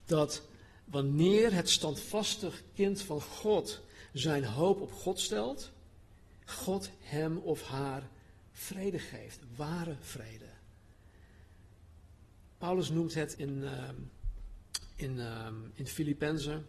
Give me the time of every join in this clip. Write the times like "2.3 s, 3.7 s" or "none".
13.3 s